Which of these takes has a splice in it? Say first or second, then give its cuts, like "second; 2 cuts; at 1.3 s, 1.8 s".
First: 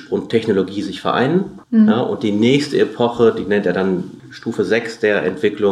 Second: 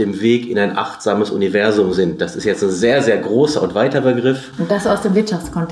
first; 2 cuts; at 1.6 s, 4.2 s